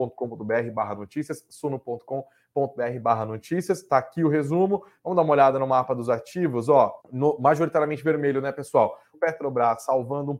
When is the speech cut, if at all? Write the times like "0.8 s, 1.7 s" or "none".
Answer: 7.0 s, 9.1 s